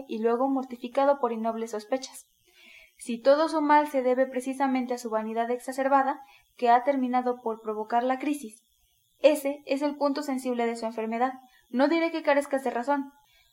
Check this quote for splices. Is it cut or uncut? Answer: uncut